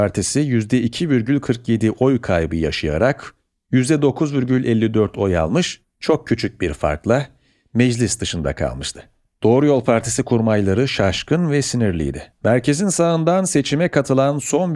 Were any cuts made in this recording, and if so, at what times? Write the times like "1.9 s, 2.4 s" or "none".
12.4 s

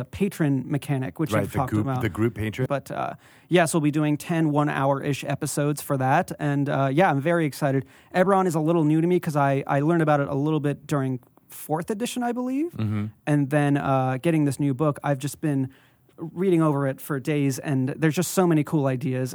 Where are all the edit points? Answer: 2.7 s

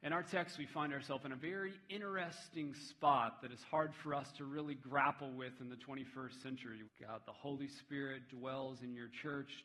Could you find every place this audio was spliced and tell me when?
6.8 s

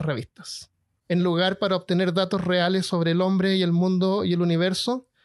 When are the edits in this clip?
1.0 s

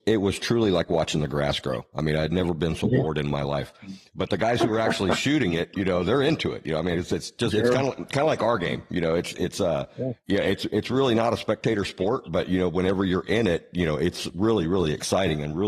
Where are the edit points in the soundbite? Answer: none

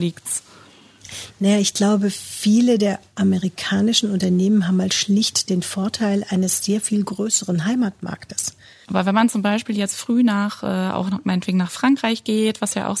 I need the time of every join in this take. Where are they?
8.8 s

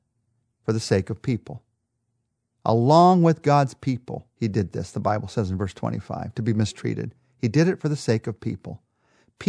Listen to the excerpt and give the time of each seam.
4.3 s

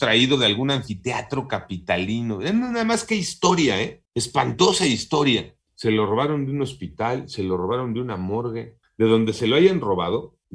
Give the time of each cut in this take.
none

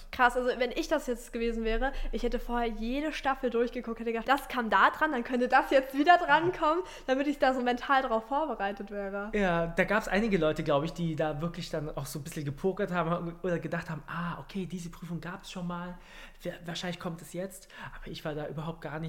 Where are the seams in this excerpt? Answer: 4.2 s

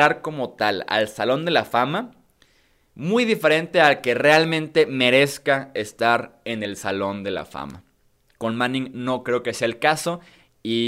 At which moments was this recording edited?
8.3 s

